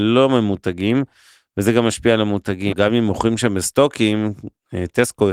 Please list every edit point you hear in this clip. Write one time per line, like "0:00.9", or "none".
0:02.7